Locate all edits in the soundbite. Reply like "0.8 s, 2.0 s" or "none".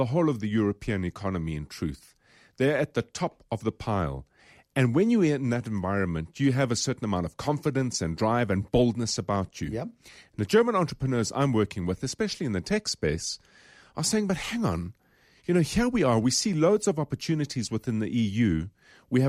none